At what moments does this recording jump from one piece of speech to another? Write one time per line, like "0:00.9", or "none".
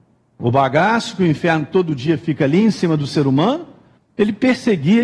0:04.0

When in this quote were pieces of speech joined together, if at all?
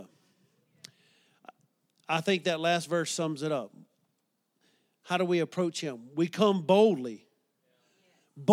none

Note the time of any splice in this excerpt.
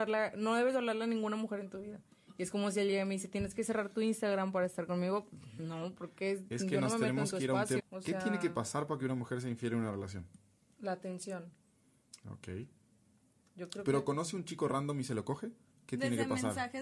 0:07.8
0:15.7

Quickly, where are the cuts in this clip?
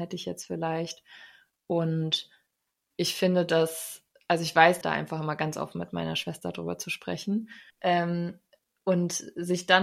0:04.8
0:07.7

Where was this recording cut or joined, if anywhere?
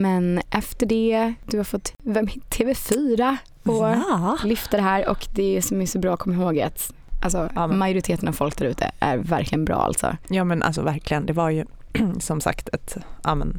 none

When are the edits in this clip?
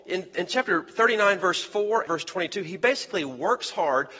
0:02.1

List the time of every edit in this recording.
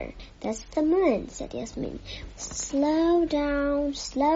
0:02.3

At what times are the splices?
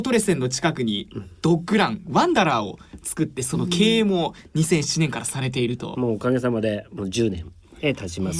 0:05.9

